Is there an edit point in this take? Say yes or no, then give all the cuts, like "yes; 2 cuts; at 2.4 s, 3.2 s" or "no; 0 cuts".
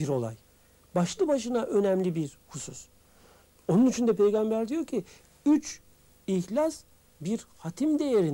no; 0 cuts